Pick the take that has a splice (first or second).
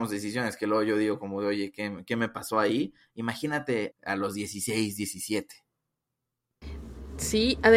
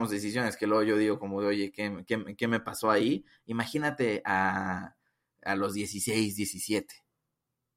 first